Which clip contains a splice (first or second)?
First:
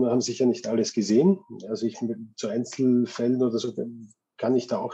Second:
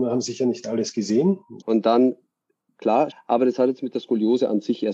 second